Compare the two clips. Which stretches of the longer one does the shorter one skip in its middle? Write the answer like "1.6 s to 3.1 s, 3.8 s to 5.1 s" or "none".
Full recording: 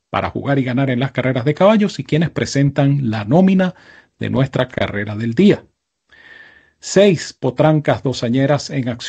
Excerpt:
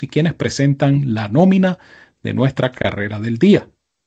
none